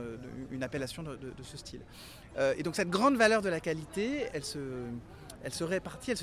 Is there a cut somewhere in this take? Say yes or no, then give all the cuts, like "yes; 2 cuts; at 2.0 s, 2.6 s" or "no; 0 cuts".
yes; 2 cuts; at 2.3 s, 4.3 s